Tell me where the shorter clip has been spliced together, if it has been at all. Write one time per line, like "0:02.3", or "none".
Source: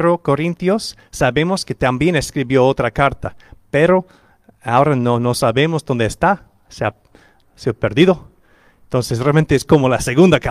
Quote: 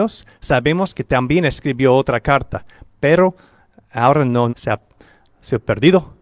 0:04.5